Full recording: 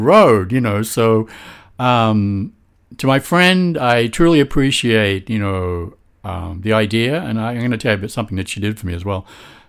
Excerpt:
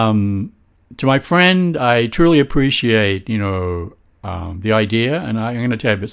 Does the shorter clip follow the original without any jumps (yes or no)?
yes